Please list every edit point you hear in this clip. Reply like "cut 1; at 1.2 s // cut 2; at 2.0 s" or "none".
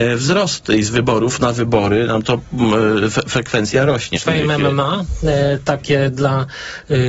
cut 1; at 4.2 s